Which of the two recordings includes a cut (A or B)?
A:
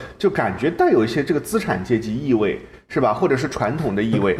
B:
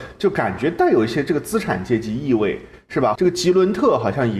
B